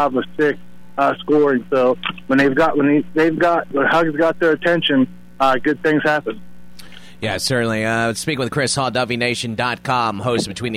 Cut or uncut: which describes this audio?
uncut